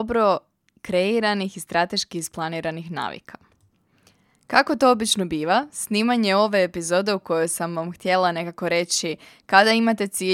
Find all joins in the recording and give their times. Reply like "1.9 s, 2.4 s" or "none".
none